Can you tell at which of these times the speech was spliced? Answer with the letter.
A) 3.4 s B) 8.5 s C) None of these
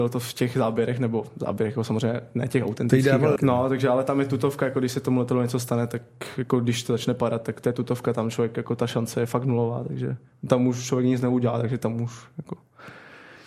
A